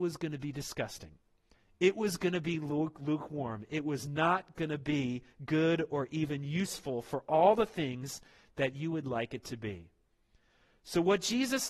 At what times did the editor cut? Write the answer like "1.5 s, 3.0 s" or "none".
none

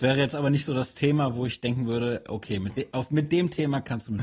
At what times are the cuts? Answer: none

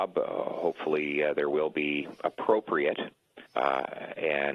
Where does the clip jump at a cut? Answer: 3.5 s

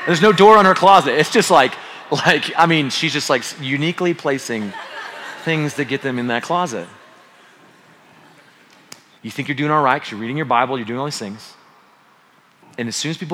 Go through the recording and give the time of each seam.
9.2 s

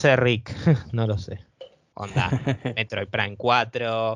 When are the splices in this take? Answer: 1.9 s

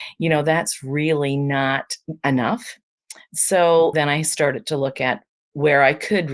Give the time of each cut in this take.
3.9 s

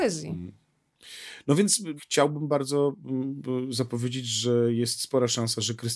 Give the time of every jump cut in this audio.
2.0 s

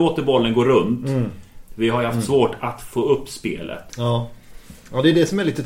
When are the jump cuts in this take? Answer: 1.7 s, 3.9 s

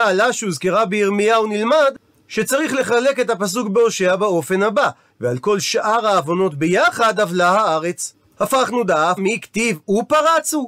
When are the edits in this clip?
5.1 s, 9.2 s

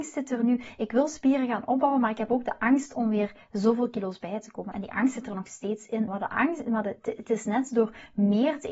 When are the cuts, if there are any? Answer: 4.7 s, 6.1 s

